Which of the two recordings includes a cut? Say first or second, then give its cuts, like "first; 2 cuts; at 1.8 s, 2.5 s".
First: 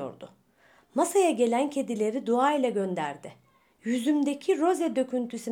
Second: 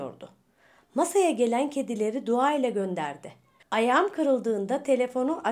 second; 1 cut; at 3.6 s